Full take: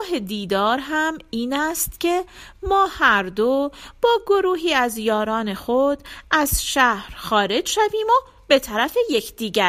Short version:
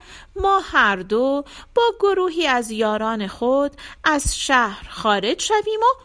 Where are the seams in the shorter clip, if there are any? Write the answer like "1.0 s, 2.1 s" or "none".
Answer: none